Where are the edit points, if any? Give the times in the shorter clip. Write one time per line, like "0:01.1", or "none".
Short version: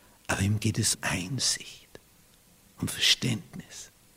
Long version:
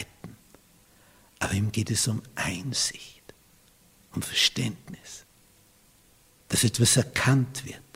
0:00.9